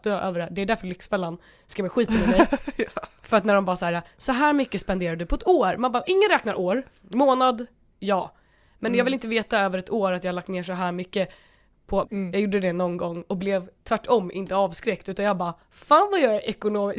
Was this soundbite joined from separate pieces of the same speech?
yes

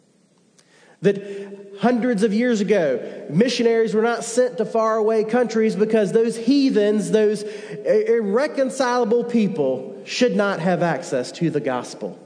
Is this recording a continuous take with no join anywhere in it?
yes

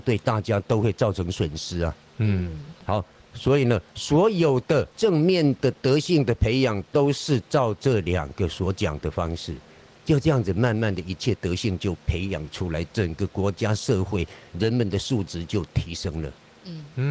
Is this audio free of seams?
yes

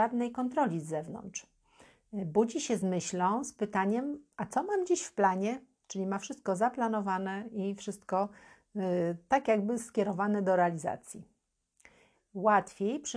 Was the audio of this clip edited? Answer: no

